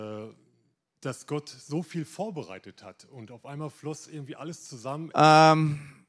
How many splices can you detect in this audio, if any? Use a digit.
1